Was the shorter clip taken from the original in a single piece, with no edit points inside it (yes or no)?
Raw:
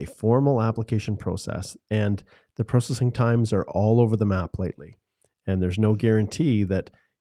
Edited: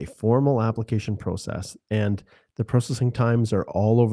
yes